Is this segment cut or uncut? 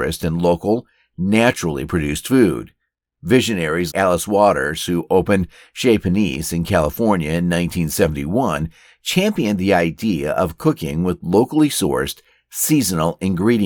cut